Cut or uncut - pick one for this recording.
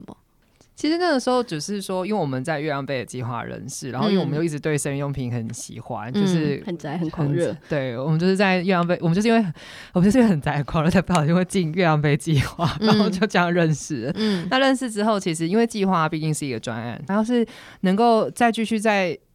cut